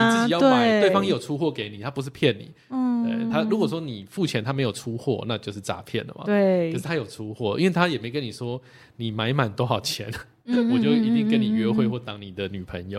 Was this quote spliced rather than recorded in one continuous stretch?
no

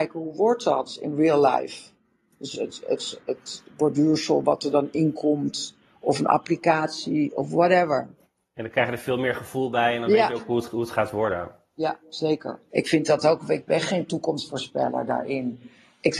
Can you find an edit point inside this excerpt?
yes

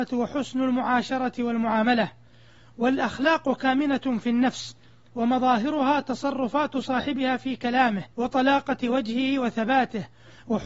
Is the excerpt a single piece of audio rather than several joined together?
no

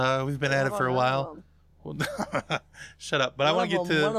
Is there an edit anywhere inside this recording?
no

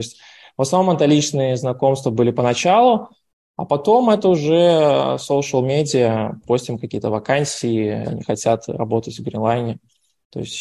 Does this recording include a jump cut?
yes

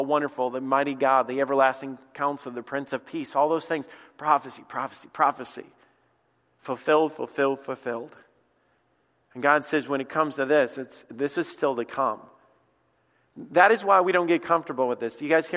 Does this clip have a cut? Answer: no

